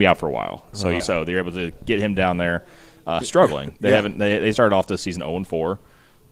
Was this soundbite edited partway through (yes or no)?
yes